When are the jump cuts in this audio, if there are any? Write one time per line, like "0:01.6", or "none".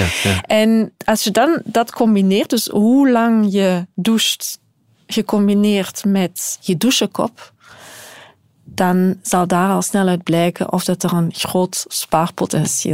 none